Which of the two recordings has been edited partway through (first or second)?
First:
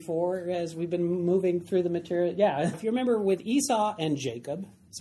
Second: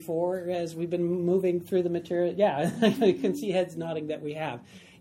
first